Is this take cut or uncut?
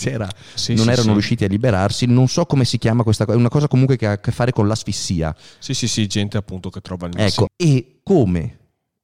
cut